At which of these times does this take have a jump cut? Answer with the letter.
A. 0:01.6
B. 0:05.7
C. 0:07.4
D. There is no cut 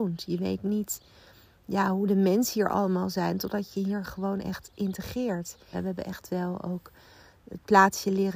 B